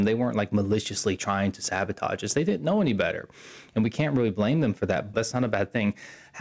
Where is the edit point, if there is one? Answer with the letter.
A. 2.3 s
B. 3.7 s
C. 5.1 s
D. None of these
C